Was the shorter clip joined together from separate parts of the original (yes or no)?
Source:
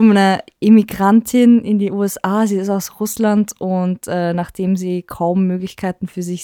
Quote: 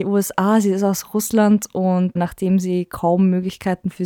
yes